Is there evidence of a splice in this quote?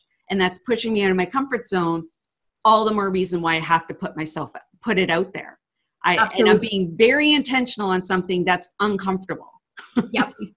no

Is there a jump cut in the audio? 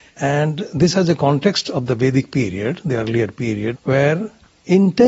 yes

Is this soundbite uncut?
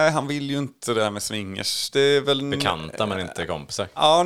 no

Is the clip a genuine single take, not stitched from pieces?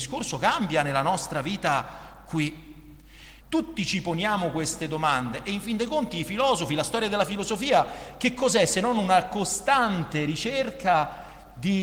no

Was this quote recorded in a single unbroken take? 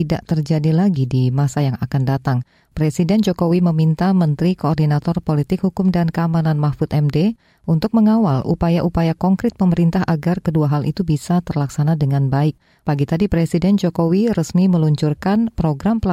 no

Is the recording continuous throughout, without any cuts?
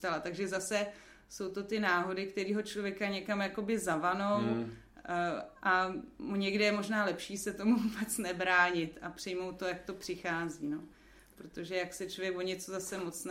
yes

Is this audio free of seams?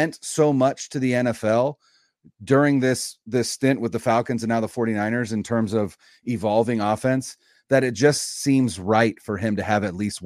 yes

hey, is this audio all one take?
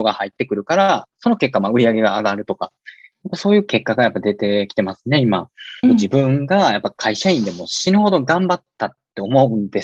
no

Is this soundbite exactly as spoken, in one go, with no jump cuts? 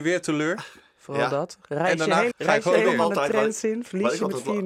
no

